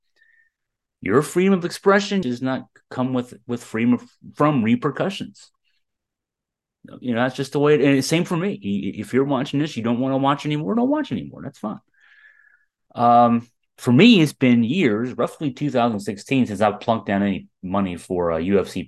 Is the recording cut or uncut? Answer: cut